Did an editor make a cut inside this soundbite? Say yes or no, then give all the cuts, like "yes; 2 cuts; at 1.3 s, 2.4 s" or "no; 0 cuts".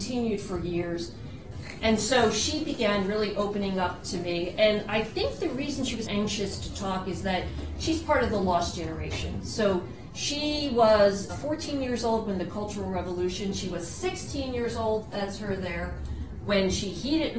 yes; 3 cuts; at 1.5 s, 6.1 s, 11.3 s